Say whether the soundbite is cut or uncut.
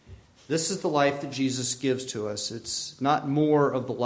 uncut